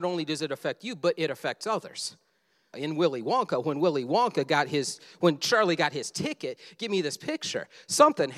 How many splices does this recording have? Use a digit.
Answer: 1